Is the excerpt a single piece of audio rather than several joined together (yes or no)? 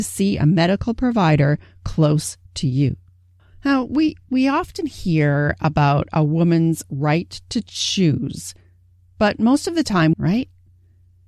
no